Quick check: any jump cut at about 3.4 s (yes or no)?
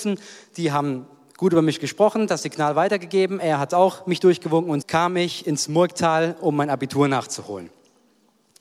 no